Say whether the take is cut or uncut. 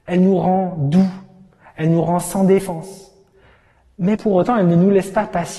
cut